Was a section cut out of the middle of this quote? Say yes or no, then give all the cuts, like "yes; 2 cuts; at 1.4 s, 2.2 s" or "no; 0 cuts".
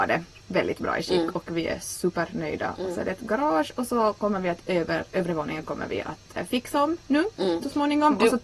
no; 0 cuts